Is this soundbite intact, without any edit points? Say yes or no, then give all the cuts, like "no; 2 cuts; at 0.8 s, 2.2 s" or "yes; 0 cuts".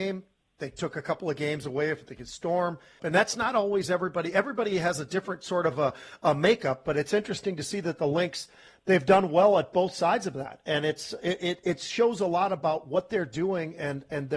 no; 1 cut; at 3.0 s